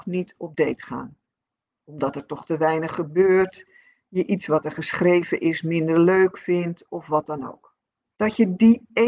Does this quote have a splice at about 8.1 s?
yes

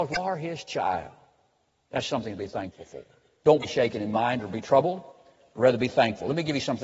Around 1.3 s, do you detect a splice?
no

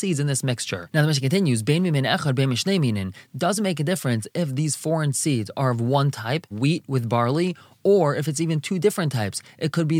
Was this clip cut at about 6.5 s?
yes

